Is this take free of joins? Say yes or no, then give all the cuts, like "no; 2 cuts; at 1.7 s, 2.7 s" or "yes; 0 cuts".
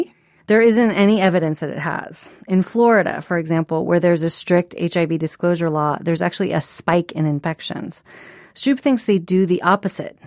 yes; 0 cuts